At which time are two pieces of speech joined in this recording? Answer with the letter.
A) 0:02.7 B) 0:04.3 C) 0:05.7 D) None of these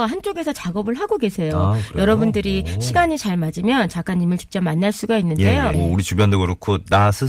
C